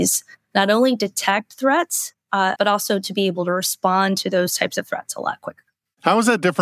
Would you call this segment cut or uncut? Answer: cut